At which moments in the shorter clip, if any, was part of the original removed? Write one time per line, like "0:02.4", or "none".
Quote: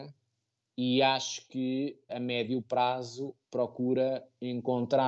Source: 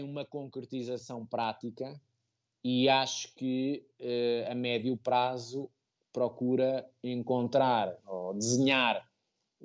0:02.1
0:03.4